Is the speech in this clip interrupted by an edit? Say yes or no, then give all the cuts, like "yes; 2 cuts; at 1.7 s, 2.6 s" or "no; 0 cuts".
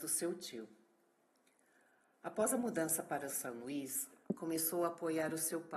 no; 0 cuts